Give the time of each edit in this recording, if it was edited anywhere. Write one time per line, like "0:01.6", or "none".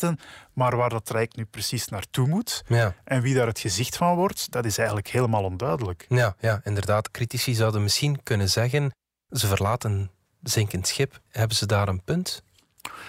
0:11.3